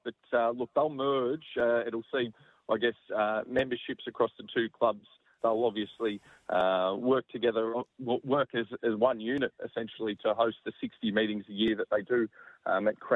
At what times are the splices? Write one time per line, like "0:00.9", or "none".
0:05.4
0:07.7